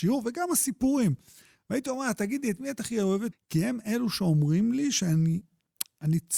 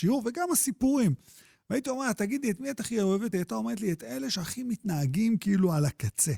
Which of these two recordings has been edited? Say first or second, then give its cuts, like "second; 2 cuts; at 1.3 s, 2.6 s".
first; 1 cut; at 3.3 s